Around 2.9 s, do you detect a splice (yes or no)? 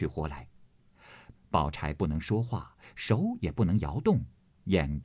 no